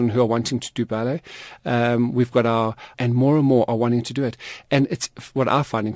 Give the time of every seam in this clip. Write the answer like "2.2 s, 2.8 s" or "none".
2.9 s